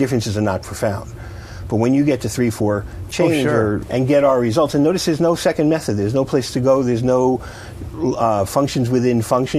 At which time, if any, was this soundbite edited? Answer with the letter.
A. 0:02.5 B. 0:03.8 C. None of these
B